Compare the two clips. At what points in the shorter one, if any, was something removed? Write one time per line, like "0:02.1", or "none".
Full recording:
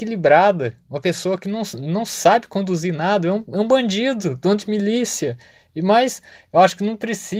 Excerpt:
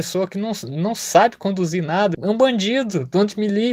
0:02.1

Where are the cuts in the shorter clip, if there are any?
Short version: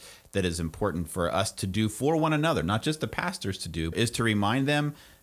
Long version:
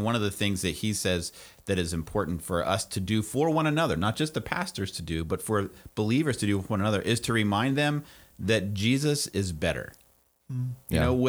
0:03.9

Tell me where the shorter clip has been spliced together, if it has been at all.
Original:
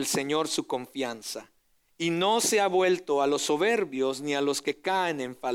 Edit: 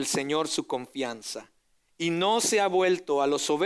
none

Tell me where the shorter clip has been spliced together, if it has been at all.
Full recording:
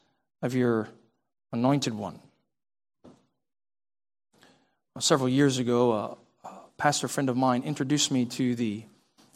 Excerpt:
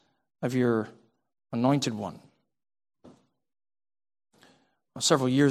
none

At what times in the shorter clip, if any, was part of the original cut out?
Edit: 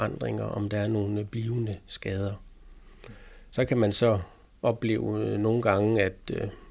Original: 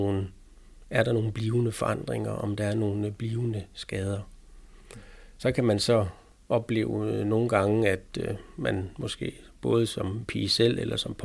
none

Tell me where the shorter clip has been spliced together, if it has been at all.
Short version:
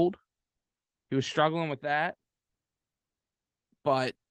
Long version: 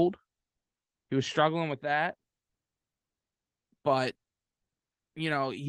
none

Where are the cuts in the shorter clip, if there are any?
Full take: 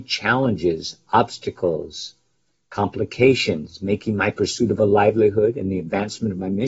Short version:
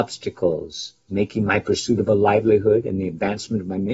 0:01.1

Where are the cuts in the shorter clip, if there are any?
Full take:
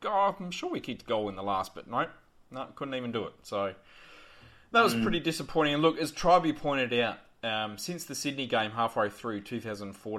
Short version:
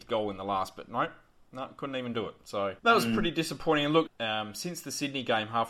0:02.8
0:04.1

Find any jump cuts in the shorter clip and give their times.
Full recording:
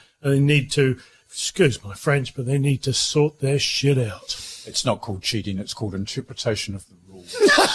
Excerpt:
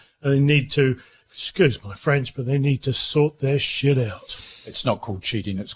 none

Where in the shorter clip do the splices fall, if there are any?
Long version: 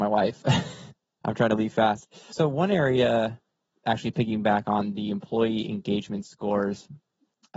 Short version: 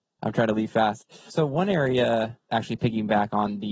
0:02.4

